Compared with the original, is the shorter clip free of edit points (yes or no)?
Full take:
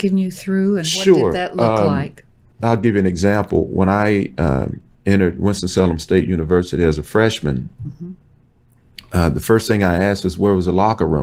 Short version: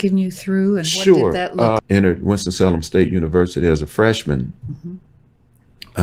no